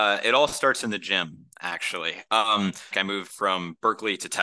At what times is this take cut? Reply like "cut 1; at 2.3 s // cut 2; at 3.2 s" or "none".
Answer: cut 1; at 2.9 s